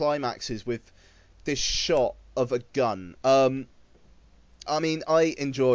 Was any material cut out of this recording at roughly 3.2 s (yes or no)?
yes